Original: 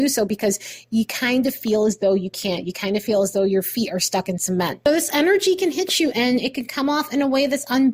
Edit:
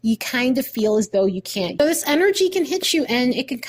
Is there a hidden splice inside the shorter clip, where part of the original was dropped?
yes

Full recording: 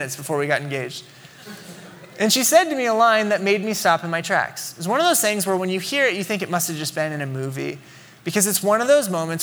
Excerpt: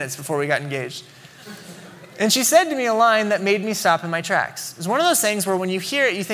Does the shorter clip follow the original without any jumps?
yes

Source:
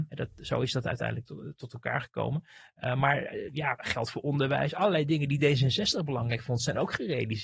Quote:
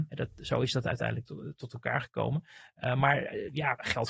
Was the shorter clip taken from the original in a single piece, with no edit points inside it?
yes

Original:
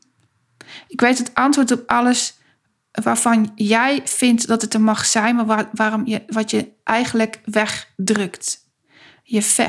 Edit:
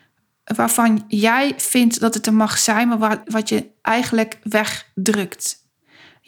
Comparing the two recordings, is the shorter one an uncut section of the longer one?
no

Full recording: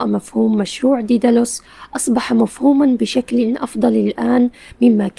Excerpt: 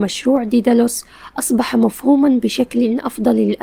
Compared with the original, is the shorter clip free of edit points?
yes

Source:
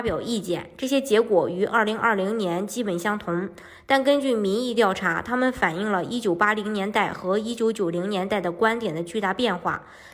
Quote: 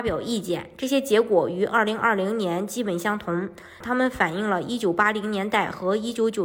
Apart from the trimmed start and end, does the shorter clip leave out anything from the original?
yes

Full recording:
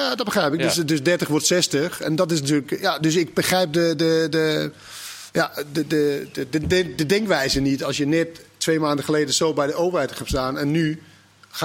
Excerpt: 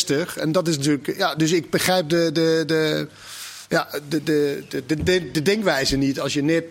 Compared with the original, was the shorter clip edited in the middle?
no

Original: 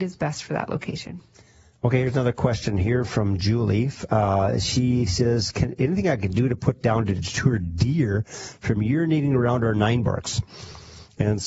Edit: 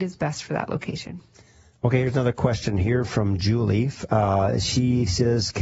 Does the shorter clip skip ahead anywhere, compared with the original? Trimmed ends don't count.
no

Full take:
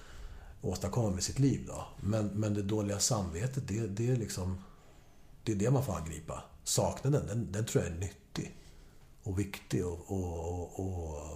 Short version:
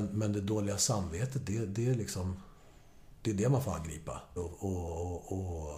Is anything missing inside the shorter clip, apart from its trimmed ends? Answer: yes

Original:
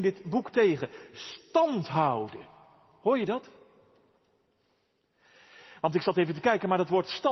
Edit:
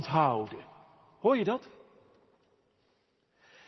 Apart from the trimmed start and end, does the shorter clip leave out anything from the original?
no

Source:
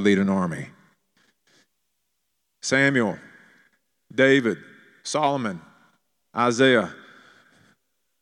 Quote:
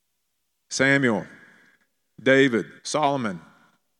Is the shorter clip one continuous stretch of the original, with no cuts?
no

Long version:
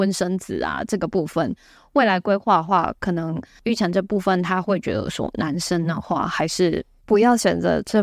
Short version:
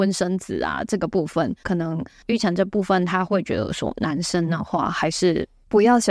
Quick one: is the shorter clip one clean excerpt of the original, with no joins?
no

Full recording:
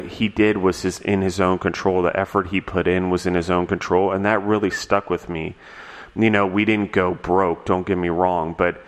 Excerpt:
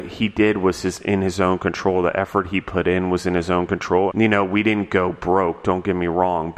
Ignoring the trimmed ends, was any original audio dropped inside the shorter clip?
yes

